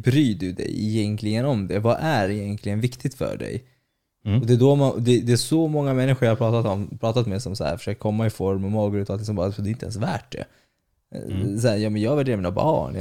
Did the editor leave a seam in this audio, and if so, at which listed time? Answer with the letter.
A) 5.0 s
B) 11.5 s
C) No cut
C